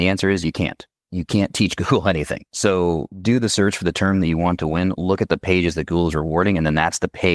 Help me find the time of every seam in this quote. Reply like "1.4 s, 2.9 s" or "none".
none